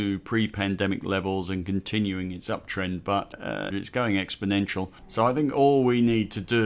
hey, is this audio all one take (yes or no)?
no